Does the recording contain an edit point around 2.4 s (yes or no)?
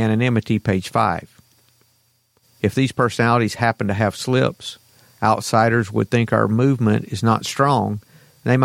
yes